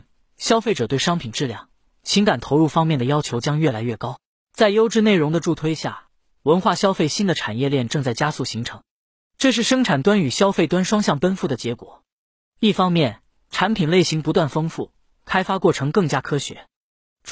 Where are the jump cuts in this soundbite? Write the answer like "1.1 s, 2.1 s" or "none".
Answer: 4.3 s